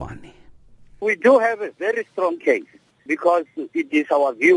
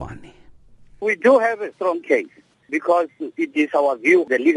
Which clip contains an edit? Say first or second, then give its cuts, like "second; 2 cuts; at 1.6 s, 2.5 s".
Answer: second; 1 cut; at 1.7 s